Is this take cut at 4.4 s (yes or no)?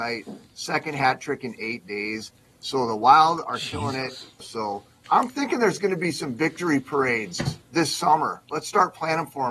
yes